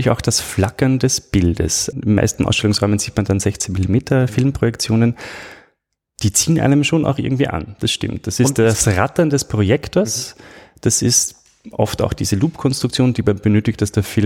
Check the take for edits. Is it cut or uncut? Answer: cut